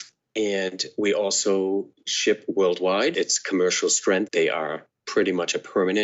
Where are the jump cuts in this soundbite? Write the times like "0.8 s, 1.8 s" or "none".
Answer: 3.1 s, 4.3 s